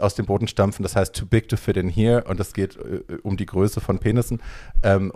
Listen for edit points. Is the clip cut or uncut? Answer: uncut